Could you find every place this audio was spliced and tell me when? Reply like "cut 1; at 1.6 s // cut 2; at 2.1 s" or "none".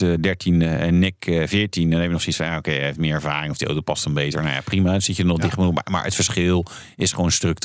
none